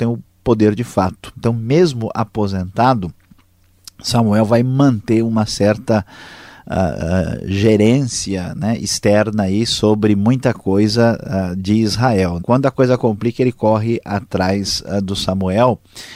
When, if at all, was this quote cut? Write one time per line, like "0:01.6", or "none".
0:12.4